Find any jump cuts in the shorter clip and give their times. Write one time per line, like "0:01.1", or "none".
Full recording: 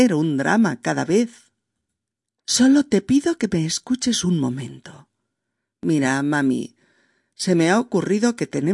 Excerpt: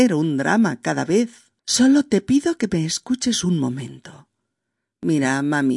0:01.6